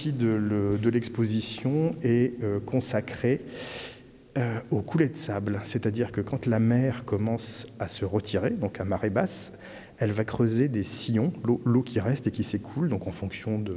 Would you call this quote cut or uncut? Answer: uncut